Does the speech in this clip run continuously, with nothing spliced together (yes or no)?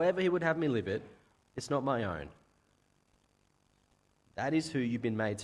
yes